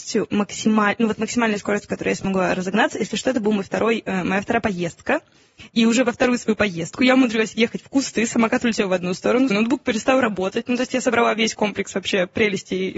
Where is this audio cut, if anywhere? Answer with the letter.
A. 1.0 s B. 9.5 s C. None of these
B